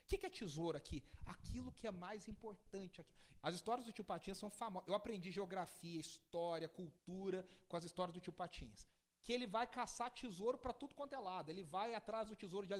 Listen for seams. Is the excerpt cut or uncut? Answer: cut